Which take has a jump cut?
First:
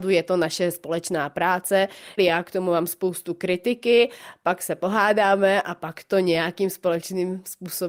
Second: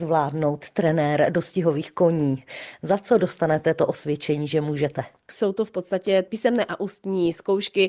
first; 1 cut; at 2.2 s

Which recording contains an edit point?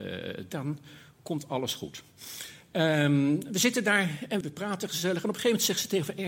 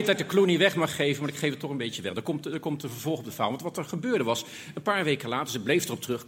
first; 1 cut; at 4.4 s

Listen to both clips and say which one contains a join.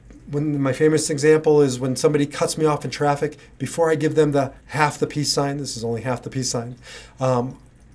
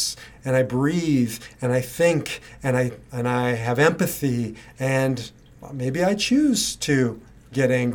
first; 1 cut; at 4.6 s

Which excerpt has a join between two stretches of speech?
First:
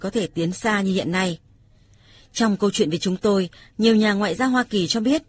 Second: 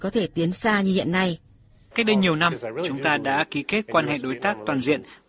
second; 1 cut; at 1.9 s

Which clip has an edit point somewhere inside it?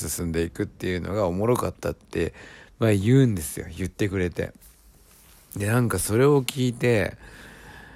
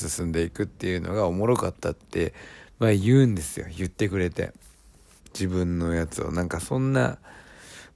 second; 1 cut; at 5.2 s

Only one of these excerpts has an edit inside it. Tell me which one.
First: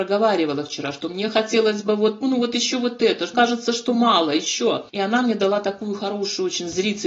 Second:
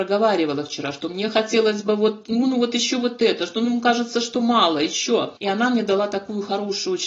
first; 2 cuts; at 2.2 s, 3.3 s

